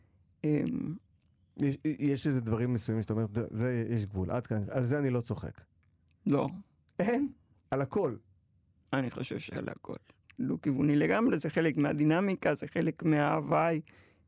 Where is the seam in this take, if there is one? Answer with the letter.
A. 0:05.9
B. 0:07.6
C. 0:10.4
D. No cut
C